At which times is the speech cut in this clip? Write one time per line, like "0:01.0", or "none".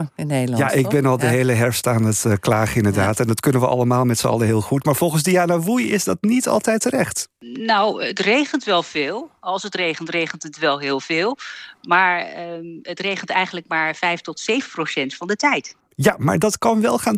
none